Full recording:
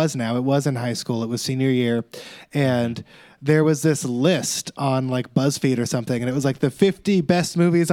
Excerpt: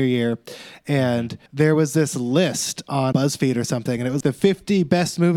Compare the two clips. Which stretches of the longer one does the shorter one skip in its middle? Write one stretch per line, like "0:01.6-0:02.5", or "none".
0:03.1-0:03.3
0:05.0-0:05.3
0:06.4-0:06.6